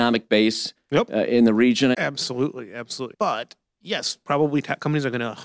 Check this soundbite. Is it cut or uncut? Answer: cut